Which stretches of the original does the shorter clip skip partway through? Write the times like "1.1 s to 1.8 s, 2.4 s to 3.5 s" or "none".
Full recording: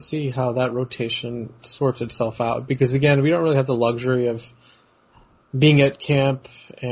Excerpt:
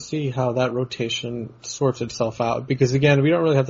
none